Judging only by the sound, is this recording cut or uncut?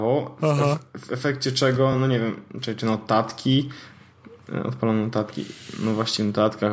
uncut